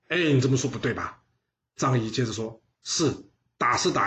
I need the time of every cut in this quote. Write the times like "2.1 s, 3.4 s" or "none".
1.6 s